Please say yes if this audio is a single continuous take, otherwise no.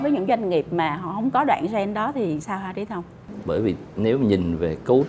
no